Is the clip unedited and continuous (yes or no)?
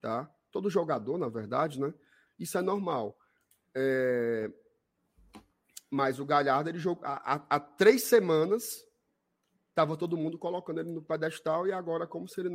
no